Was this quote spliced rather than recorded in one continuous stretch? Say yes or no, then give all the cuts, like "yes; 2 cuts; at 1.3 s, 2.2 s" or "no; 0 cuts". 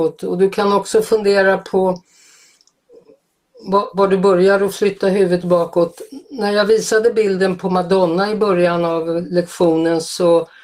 no; 0 cuts